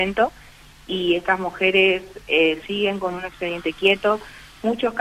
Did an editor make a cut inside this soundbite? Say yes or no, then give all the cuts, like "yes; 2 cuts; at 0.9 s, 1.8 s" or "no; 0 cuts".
yes; 1 cut; at 2.6 s